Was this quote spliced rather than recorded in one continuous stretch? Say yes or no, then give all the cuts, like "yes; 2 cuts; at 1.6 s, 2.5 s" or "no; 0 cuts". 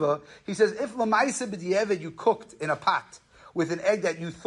no; 0 cuts